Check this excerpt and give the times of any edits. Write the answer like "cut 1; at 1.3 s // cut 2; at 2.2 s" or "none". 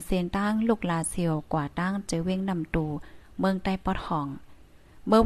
none